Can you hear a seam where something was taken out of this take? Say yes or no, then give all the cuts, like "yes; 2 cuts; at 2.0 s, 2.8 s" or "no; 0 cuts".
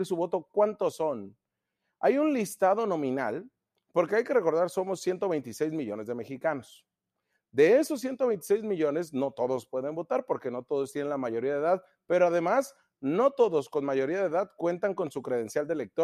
no; 0 cuts